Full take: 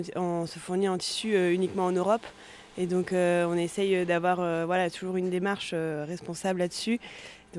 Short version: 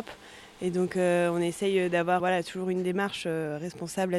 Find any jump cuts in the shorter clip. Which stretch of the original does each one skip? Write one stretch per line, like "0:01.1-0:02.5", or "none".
0:04.4-0:04.7